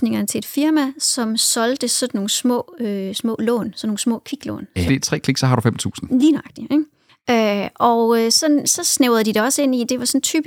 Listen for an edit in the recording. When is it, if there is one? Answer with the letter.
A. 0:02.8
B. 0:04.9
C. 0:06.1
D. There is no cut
B